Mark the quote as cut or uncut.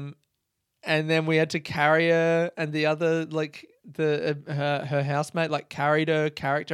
uncut